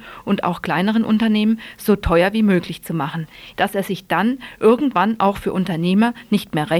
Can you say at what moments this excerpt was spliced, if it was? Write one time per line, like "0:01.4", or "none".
0:03.5